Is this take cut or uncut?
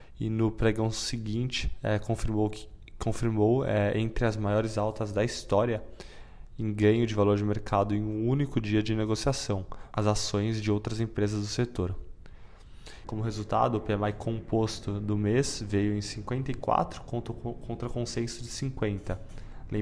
cut